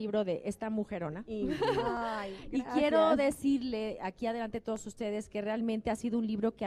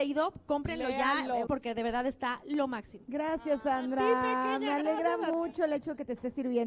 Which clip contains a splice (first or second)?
second